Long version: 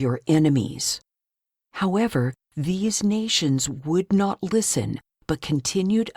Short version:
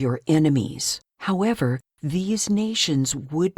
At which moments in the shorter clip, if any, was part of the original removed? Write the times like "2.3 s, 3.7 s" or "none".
1.1 s